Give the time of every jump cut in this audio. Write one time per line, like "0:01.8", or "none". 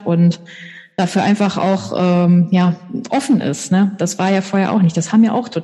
none